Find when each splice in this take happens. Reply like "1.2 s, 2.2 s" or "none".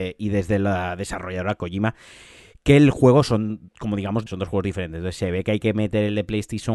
4.3 s